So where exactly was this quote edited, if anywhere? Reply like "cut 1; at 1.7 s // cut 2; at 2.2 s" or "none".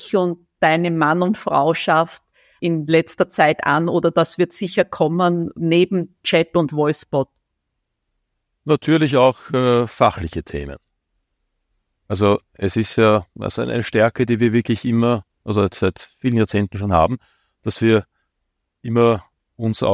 none